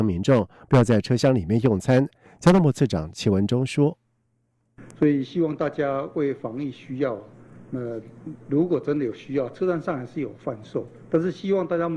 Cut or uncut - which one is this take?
uncut